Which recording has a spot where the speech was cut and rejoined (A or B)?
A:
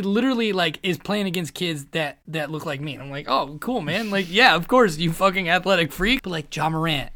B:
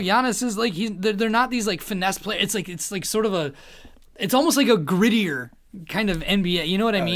A